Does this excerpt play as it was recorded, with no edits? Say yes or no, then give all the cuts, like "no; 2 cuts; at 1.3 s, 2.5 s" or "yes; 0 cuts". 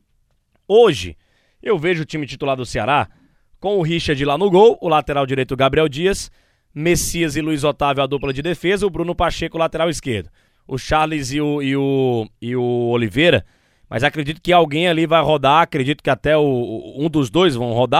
no; 2 cuts; at 10.5 s, 12.4 s